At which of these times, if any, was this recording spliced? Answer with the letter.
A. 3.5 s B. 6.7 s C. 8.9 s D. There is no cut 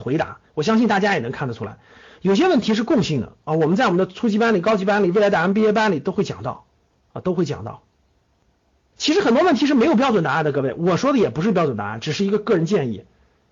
C